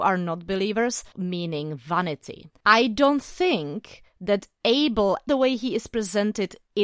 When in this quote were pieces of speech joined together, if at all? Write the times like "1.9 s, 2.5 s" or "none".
1.1 s, 5.3 s